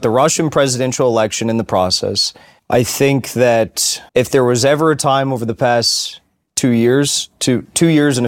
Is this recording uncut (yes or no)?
no